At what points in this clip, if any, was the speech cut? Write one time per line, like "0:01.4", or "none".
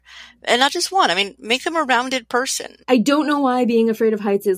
0:02.8